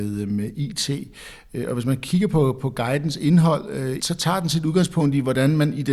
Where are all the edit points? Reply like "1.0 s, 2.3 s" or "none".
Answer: 4.0 s